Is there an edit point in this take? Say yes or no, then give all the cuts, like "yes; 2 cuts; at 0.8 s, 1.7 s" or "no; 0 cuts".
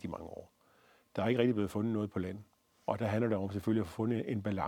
yes; 1 cut; at 2.8 s